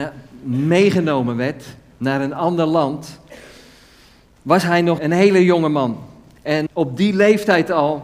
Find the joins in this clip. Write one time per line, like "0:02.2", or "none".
0:05.0
0:06.7